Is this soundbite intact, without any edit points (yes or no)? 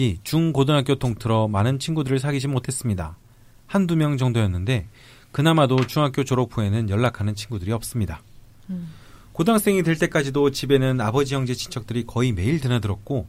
yes